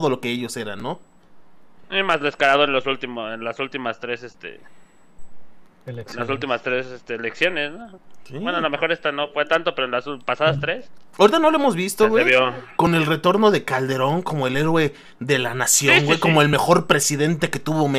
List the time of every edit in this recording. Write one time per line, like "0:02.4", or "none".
none